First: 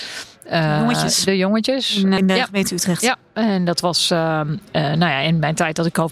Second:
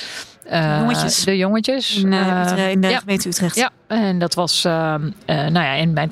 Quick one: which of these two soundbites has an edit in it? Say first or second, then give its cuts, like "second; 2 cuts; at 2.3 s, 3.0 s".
first; 1 cut; at 2.2 s